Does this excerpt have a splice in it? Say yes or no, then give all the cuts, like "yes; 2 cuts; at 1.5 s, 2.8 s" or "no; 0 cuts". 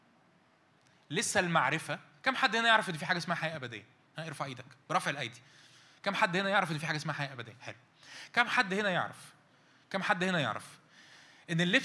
no; 0 cuts